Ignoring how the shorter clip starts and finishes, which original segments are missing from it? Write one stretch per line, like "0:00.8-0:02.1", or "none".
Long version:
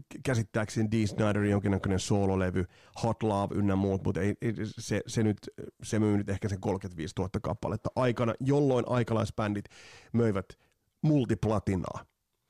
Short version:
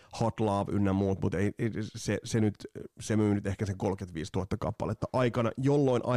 none